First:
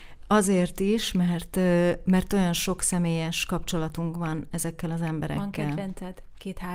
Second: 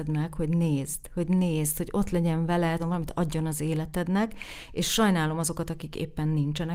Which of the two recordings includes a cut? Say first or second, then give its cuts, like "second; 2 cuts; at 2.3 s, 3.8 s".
second; 1 cut; at 2.8 s